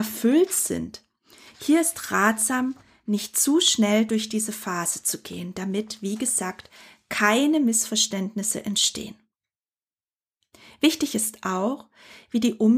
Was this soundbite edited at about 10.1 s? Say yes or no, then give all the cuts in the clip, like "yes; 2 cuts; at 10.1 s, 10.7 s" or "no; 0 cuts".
no; 0 cuts